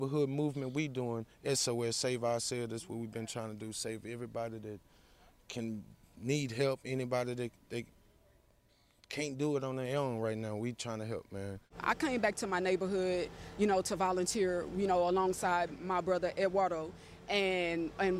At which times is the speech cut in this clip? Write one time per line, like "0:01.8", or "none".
none